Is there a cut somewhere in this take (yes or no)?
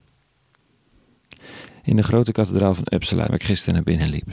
yes